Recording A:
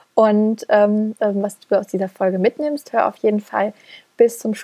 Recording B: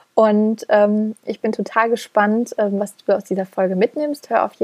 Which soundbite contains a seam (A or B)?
A